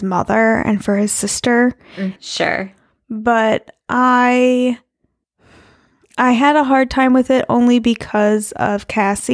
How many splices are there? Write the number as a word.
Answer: one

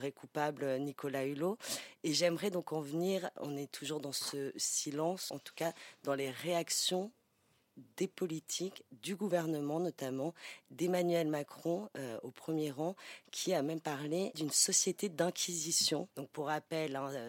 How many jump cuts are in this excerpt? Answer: one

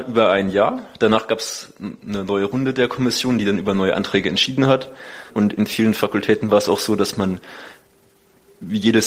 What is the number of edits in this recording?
one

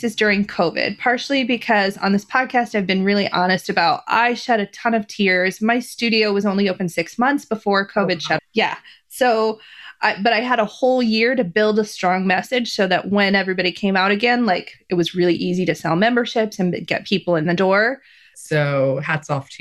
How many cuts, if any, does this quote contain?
two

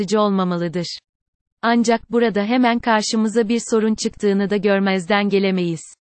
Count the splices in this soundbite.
zero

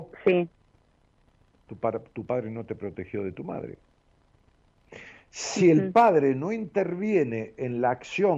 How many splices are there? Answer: zero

